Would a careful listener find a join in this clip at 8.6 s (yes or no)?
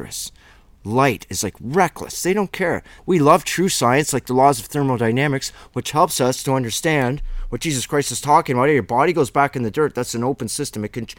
no